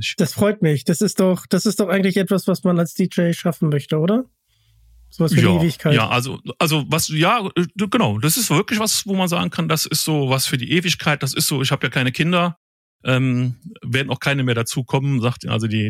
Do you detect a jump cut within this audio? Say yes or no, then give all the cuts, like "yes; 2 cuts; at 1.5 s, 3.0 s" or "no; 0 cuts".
no; 0 cuts